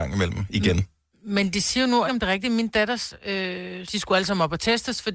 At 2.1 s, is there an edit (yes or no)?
yes